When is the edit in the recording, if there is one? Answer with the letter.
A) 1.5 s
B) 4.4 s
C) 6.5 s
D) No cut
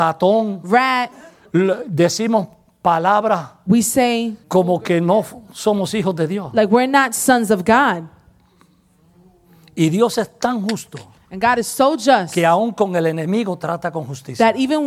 B